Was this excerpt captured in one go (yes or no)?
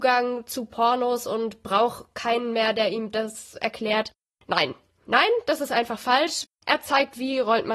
no